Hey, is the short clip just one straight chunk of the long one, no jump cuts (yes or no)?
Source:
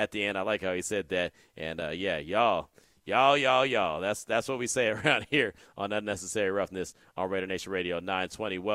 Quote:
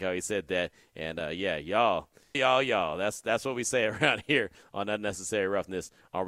no